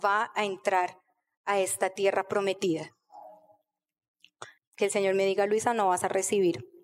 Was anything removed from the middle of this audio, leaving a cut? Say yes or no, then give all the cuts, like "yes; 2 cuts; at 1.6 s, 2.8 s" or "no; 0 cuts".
yes; 1 cut; at 4.6 s